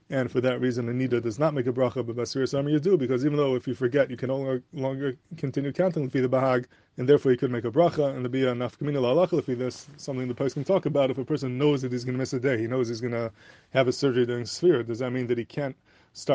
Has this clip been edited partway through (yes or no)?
yes